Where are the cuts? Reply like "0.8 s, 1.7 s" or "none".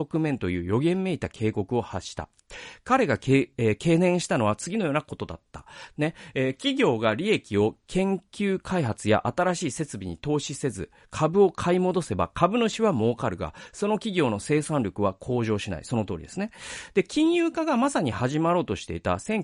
5.9 s